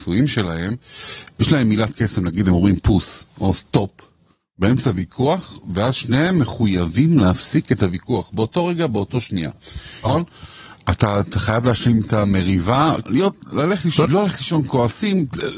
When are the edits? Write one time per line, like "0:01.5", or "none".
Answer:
0:10.0
0:13.0
0:14.0